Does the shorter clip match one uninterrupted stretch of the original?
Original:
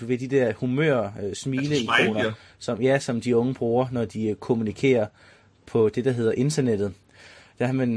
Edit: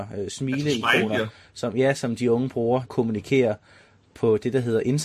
no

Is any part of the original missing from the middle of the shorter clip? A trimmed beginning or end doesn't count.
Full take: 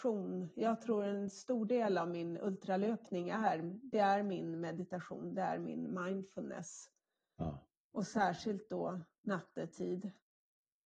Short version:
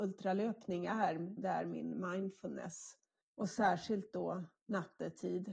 yes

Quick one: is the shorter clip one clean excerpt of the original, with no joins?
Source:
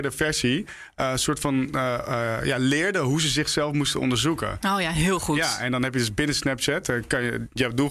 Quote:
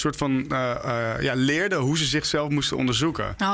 yes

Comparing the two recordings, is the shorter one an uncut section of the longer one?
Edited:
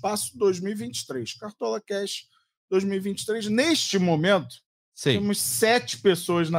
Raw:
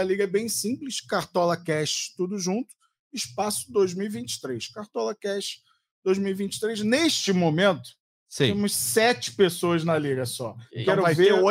yes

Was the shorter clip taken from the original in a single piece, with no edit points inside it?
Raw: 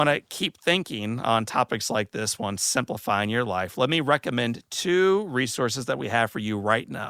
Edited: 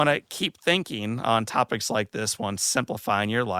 yes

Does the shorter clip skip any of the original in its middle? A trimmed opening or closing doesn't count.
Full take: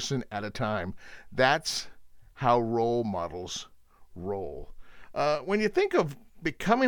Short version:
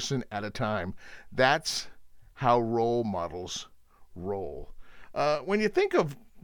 no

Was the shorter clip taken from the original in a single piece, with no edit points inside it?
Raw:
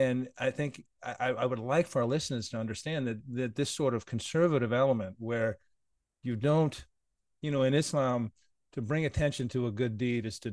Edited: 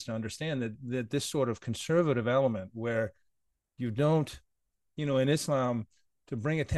yes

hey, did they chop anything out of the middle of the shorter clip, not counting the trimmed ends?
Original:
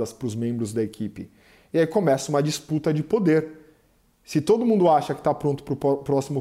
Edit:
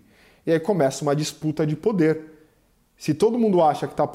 no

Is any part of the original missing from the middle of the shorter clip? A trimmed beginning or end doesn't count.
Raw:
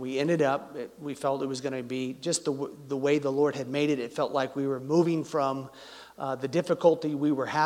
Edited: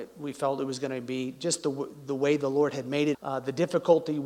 yes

